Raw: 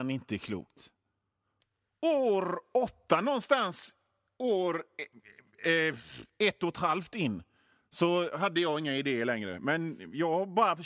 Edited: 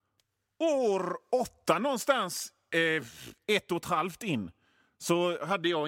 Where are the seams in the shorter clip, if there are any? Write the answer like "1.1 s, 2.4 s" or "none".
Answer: 2.7 s